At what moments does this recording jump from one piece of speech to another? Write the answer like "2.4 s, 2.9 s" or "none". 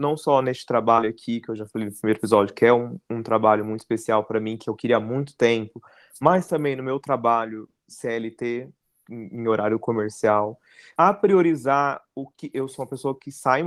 11.0 s